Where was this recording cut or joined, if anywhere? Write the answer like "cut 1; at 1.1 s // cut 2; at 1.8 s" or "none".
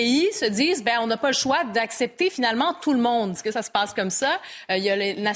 cut 1; at 3.4 s